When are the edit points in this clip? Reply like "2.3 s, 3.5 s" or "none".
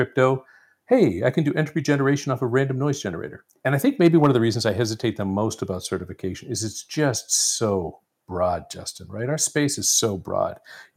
3.5 s